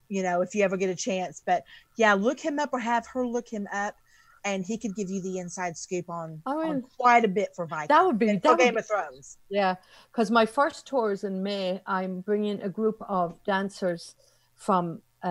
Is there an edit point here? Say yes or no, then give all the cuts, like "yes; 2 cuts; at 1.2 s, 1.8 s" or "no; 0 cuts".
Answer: no; 0 cuts